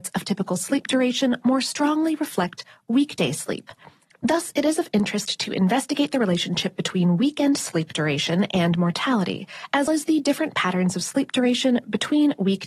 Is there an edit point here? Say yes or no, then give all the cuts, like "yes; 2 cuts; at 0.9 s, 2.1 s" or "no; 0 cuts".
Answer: yes; 1 cut; at 9.9 s